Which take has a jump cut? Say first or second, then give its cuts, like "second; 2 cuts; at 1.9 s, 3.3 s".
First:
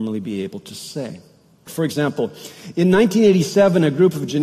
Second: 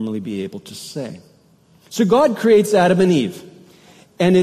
first; 1 cut; at 1.7 s